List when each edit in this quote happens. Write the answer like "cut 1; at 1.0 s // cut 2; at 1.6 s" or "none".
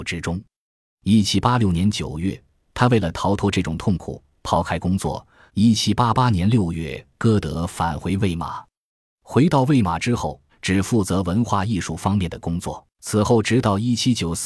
cut 1; at 5.5 s // cut 2; at 10.5 s // cut 3; at 12.9 s